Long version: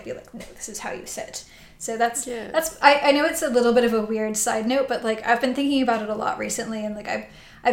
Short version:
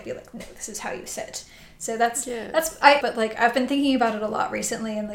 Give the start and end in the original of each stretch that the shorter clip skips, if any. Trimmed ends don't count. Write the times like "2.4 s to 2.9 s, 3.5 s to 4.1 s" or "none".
3.0 s to 4.9 s